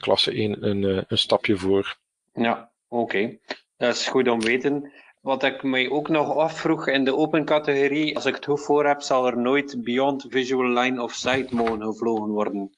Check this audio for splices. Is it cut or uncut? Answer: cut